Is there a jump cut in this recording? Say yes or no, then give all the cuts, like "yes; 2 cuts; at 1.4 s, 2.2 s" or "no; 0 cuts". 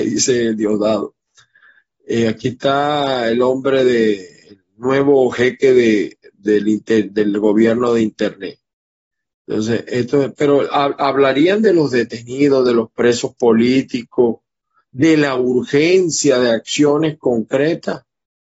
no; 0 cuts